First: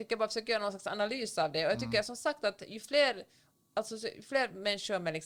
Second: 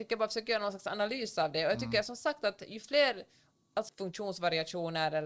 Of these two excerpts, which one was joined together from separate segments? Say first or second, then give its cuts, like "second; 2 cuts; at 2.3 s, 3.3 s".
second; 1 cut; at 3.9 s